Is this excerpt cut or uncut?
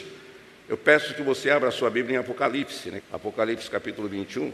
cut